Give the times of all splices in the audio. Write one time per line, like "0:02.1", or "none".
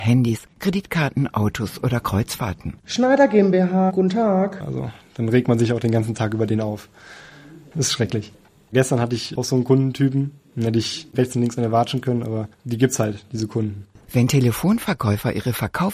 0:04.6
0:12.5